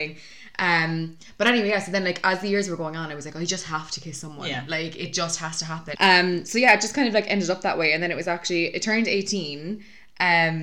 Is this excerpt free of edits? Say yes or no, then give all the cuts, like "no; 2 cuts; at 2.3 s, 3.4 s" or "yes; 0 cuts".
no; 1 cut; at 5.9 s